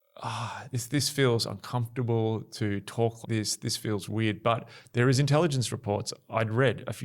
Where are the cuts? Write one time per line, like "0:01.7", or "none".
0:03.2